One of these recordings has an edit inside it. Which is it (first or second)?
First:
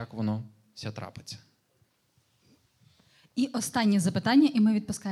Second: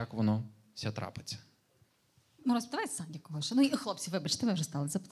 second